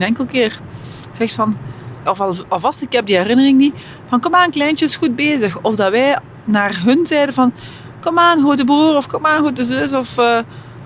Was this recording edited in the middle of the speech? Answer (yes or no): yes